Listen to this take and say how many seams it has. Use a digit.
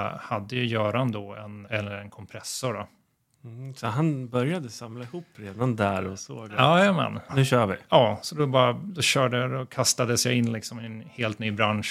2